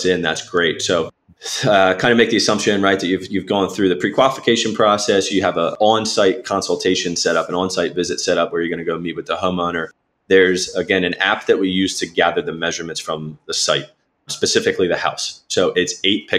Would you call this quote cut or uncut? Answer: uncut